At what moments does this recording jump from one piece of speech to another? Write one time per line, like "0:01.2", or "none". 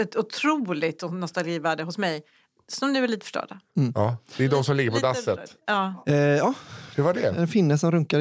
0:06.9